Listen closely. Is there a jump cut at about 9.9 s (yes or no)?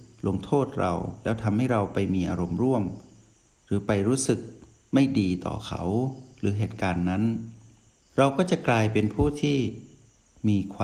no